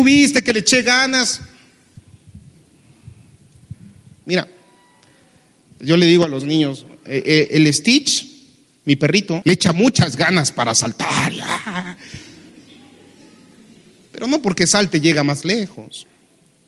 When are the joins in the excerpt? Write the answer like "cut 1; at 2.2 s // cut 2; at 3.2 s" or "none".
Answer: cut 1; at 9.4 s